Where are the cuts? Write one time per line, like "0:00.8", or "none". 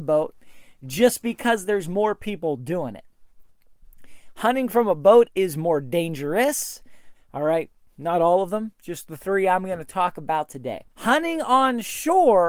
0:07.1
0:10.9